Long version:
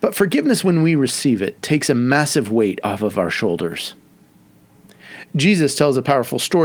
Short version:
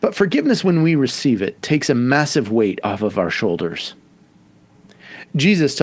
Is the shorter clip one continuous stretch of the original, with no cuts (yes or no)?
yes